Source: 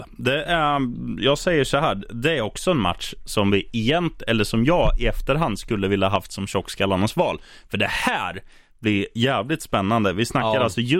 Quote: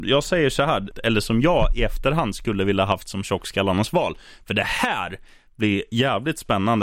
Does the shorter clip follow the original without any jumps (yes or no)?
no